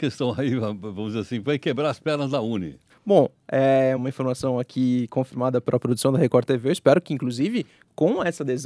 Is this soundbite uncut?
no; 2 cuts; at 2.9 s, 4.0 s

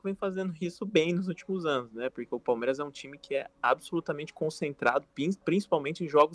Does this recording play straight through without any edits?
yes; 0 cuts

